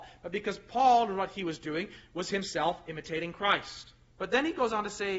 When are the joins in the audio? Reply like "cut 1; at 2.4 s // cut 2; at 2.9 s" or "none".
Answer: cut 1; at 4.1 s